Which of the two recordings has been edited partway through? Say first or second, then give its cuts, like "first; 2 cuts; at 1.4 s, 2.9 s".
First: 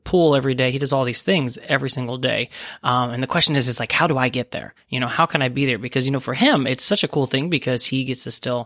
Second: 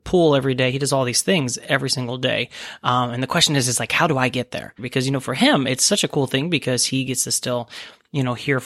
second; 1 cut; at 4.8 s